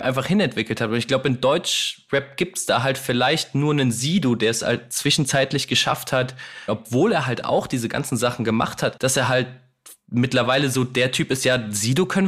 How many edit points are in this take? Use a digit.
2